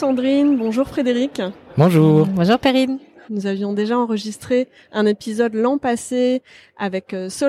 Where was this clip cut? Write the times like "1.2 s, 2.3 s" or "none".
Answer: 3.3 s